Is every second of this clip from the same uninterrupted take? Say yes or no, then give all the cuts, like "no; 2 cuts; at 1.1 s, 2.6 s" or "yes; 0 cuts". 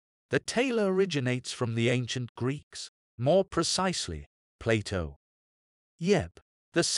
no; 1 cut; at 4.4 s